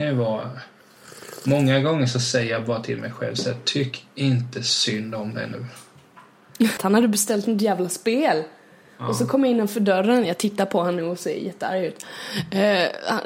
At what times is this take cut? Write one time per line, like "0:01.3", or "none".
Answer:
0:06.8